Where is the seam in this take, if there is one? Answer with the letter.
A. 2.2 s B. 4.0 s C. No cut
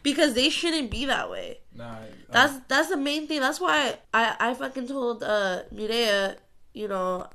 B